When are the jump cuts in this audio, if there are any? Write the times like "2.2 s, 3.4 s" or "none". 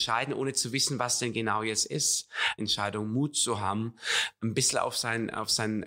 2.6 s